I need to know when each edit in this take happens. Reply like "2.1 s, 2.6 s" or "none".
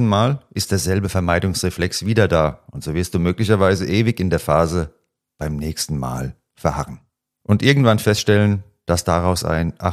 none